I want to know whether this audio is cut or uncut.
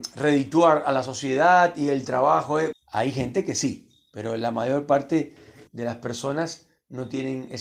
cut